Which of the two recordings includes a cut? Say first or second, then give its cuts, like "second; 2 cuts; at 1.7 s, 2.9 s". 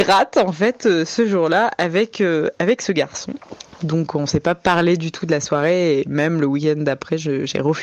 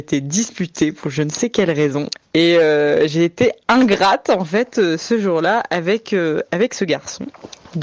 second; 1 cut; at 2.2 s